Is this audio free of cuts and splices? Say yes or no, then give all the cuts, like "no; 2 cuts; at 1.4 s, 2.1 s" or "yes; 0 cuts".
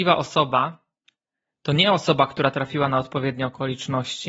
yes; 0 cuts